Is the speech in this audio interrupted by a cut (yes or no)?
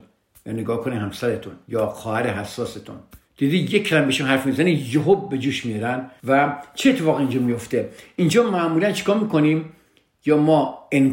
yes